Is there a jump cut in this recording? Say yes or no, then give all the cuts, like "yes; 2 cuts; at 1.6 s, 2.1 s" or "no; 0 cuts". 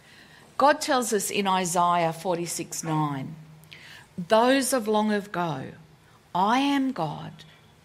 yes; 1 cut; at 4.1 s